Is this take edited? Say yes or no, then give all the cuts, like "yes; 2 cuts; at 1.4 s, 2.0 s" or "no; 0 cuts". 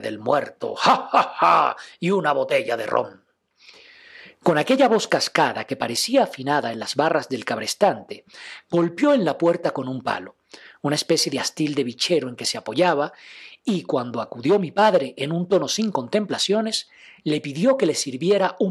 no; 0 cuts